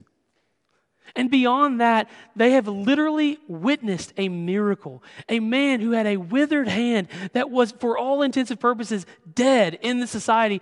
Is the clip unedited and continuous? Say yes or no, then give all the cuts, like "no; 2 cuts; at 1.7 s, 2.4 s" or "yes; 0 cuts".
yes; 0 cuts